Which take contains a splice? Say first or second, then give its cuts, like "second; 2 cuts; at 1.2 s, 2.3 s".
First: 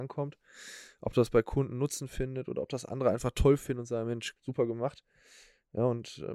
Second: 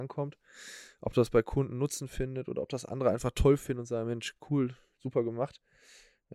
first; 1 cut; at 4.4 s